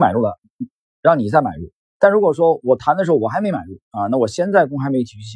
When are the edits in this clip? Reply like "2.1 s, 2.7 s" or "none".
1.8 s, 3.8 s